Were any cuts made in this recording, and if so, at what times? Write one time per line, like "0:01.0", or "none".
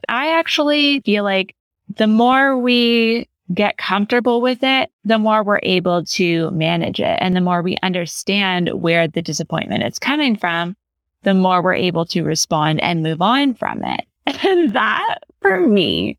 0:01.0
0:14.2